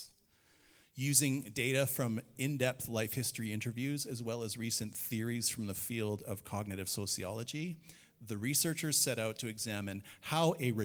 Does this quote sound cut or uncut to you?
uncut